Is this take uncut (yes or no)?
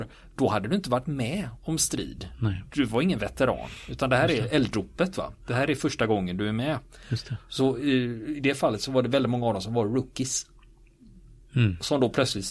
yes